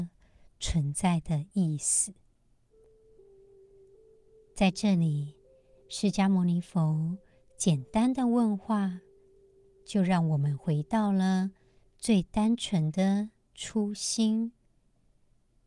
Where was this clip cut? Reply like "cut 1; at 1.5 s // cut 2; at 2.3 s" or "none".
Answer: none